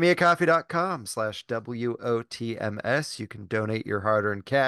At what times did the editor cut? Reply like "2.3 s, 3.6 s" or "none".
none